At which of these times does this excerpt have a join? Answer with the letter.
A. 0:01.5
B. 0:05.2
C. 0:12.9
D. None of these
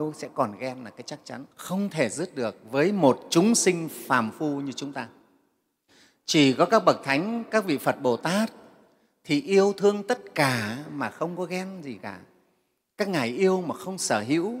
A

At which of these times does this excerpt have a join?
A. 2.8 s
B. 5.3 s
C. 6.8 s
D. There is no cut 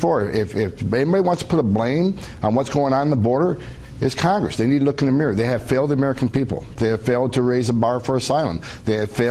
C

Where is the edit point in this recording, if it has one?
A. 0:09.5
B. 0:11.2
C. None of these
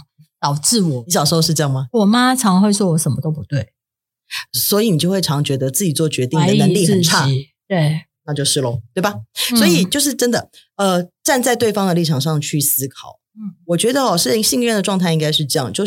C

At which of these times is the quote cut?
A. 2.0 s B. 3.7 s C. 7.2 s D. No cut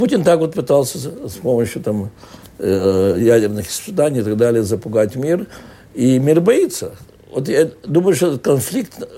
D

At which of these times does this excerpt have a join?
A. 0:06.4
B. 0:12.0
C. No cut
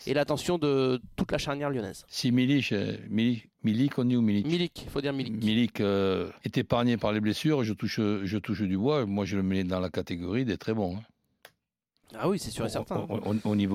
A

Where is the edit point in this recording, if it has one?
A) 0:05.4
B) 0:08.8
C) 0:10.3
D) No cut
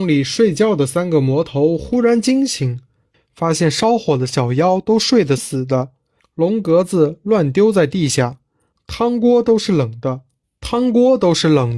A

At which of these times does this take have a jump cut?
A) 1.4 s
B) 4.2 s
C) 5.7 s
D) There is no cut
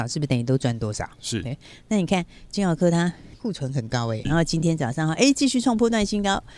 B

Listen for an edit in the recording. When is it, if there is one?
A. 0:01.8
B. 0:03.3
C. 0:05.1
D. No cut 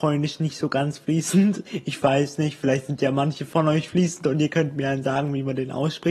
D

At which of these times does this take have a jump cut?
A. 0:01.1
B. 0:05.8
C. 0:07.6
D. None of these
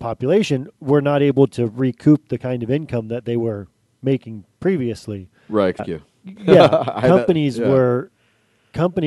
B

